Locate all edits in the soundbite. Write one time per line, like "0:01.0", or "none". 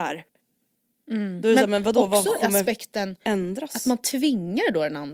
none

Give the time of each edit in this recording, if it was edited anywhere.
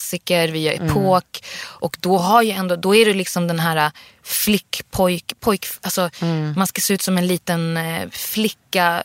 none

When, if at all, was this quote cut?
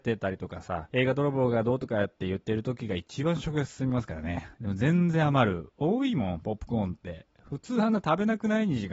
0:04.5

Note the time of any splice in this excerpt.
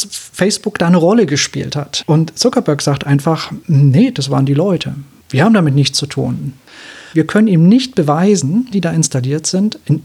0:07.1
0:08.7

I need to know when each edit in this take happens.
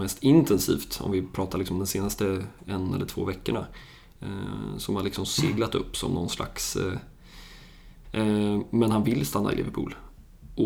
0:08.0

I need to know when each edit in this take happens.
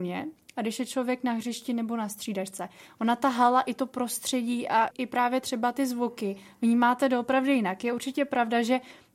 0:04.9

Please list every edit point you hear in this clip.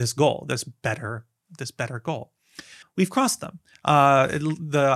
0:02.8

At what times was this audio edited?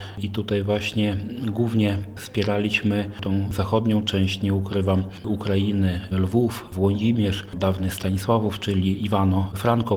none

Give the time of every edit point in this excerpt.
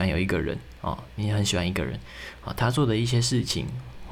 none

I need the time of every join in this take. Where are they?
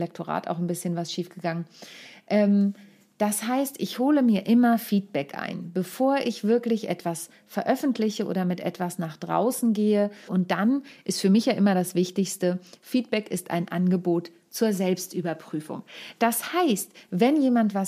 0:10.3

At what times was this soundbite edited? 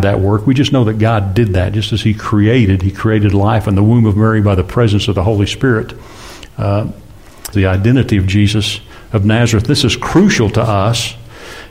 0:07.5

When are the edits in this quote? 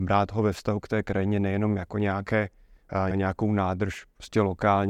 0:03.1

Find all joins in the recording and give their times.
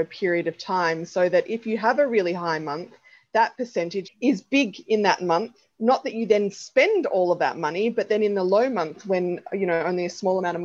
0:04.0

